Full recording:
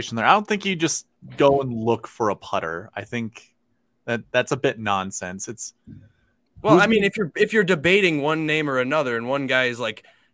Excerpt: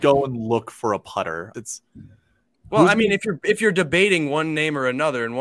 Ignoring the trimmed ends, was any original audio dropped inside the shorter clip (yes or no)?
yes